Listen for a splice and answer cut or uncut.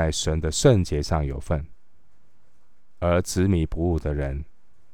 uncut